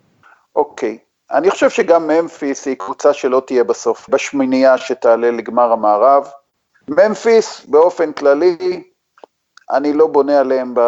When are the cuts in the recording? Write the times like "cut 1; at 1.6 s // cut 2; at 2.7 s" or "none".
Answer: cut 1; at 4.1 s // cut 2; at 6.7 s